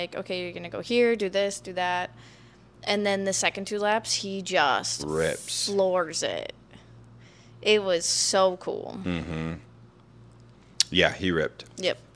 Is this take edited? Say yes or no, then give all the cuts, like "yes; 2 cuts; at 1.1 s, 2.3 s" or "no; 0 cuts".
no; 0 cuts